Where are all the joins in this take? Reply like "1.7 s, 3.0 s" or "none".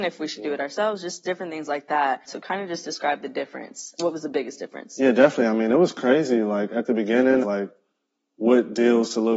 2.3 s, 7.4 s